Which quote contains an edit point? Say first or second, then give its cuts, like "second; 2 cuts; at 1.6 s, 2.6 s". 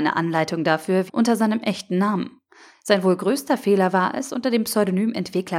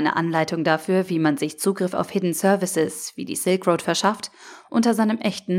first; 2 cuts; at 1.1 s, 2.7 s